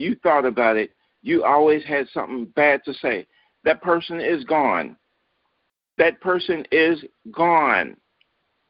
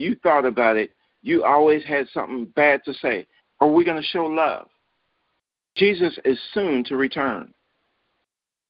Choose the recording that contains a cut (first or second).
second